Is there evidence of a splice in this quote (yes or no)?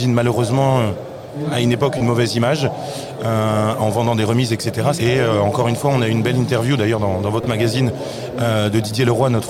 yes